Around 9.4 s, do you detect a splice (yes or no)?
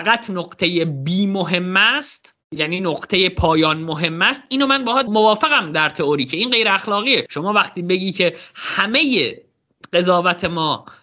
no